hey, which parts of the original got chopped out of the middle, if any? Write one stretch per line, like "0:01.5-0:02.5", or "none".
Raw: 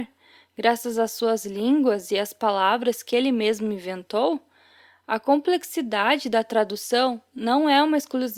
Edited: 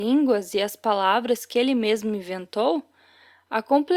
none